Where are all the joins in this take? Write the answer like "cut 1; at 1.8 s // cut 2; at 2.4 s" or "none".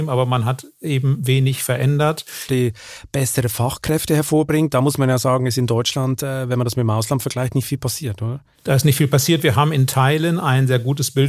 cut 1; at 2.5 s